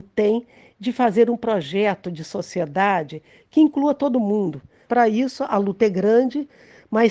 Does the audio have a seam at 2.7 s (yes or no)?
no